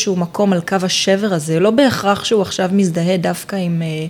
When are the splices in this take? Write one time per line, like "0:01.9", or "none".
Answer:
none